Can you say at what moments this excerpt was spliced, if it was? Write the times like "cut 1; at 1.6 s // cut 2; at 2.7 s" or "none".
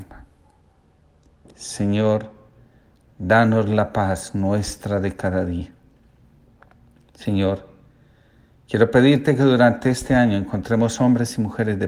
cut 1; at 1.5 s